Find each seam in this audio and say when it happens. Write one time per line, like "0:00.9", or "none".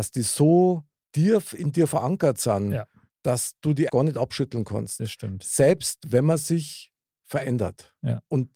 0:03.9